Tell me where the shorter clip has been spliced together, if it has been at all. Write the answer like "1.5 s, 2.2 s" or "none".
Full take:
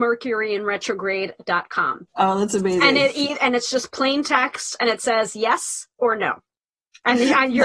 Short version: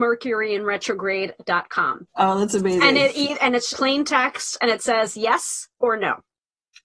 3.7 s

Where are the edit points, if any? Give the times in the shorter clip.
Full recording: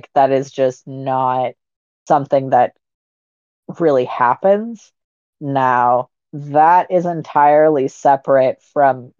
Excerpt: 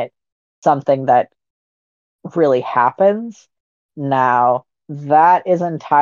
none

